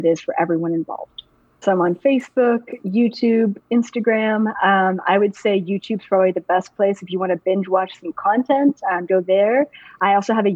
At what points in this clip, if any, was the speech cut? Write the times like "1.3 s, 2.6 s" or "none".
1.6 s, 9.1 s